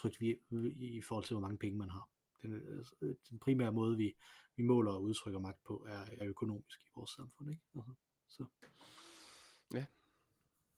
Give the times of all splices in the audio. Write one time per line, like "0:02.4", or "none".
0:06.2